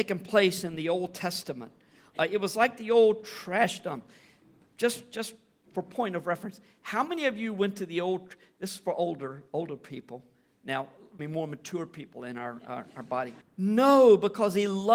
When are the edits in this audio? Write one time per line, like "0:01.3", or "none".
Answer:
0:11.2
0:13.4